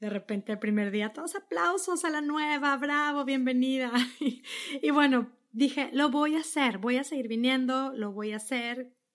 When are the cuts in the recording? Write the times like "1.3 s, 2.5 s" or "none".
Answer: none